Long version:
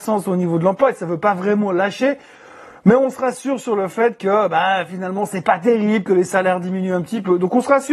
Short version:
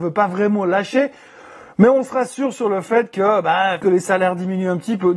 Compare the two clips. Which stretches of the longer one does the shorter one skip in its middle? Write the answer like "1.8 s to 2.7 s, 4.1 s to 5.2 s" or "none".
4.9 s to 6.0 s